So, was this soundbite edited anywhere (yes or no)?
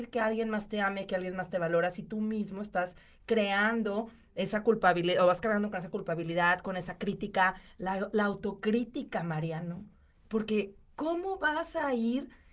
yes